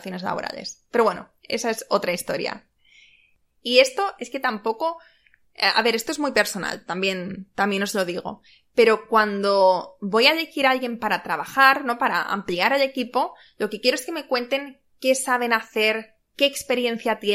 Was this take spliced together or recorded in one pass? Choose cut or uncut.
uncut